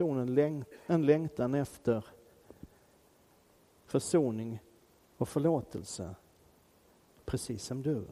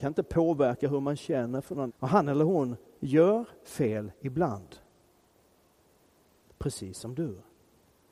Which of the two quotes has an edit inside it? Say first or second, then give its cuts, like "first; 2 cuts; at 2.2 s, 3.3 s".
second; 1 cut; at 1.9 s